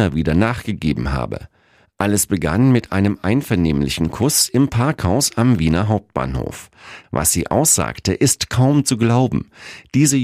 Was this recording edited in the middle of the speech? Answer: yes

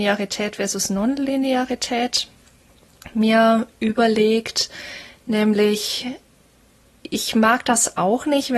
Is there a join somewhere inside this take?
no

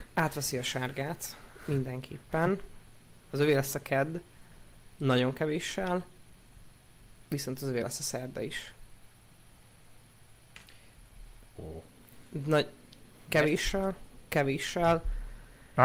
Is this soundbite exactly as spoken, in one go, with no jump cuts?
no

